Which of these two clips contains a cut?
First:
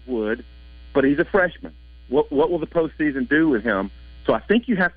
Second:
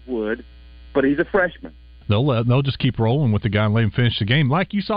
second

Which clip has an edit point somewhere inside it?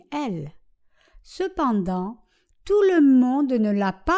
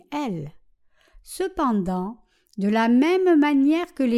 first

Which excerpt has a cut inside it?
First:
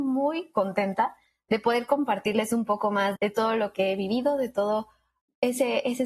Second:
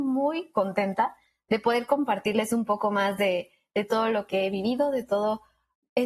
first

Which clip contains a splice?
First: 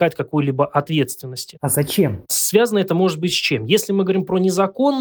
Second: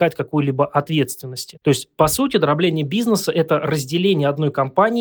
first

